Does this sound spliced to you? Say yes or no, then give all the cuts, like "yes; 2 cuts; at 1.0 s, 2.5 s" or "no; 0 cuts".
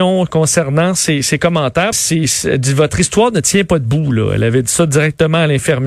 yes; 1 cut; at 1.9 s